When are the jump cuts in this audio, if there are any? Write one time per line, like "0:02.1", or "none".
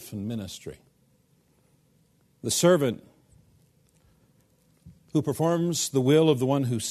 none